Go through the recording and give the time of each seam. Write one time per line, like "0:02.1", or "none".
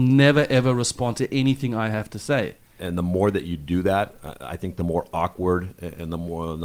0:02.8